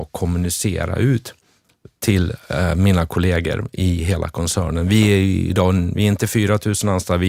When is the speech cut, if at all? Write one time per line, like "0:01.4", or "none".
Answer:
none